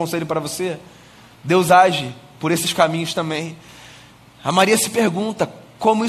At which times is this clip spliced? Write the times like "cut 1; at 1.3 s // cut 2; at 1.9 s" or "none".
cut 1; at 1.4 s